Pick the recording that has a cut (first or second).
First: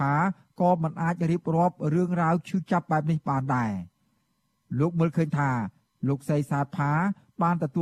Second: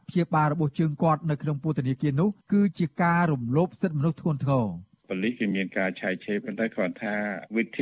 second